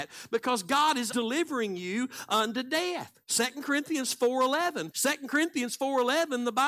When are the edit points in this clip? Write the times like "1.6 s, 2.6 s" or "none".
1.1 s, 3.2 s, 4.9 s